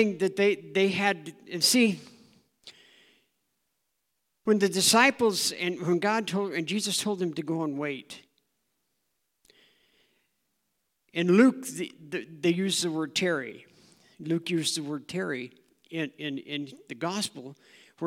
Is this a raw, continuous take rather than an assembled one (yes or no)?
yes